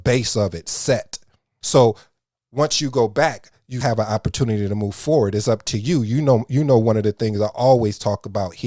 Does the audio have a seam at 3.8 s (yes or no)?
yes